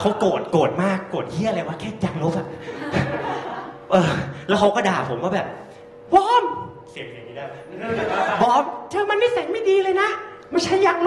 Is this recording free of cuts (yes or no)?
yes